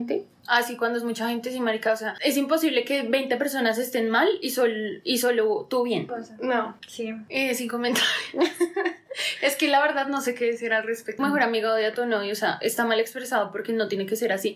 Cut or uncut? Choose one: cut